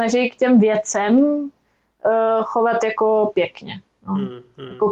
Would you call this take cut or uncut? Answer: uncut